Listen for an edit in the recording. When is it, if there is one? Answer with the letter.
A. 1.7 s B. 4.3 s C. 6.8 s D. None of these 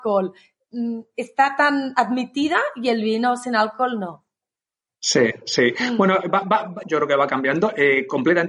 C